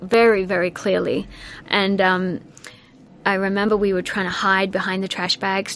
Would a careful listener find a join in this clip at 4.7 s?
no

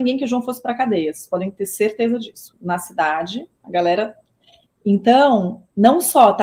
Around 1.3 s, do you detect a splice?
no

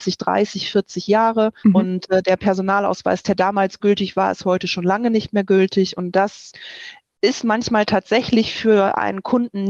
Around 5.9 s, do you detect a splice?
no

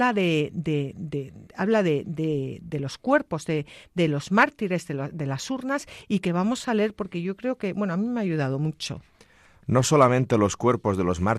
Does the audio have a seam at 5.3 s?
no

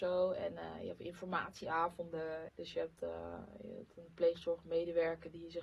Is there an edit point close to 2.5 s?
yes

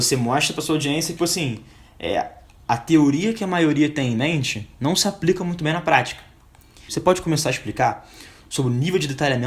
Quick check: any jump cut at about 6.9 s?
yes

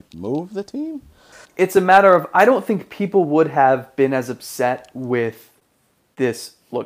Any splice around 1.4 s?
yes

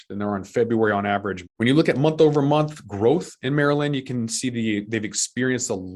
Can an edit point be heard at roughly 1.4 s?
yes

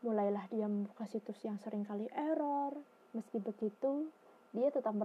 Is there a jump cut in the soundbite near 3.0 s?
yes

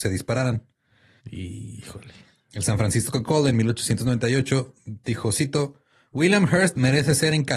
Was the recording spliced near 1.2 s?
yes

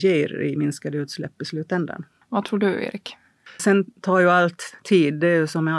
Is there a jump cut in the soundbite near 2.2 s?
no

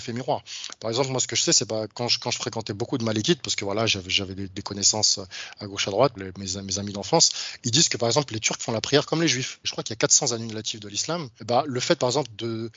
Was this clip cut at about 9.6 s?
yes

